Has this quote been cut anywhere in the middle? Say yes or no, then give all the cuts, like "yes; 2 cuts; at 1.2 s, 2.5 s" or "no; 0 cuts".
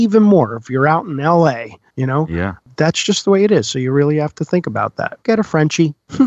yes; 1 cut; at 5.2 s